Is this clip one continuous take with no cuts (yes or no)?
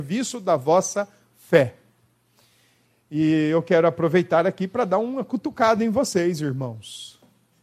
yes